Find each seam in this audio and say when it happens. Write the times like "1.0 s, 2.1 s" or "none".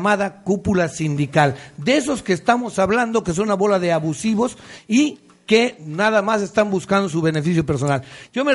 none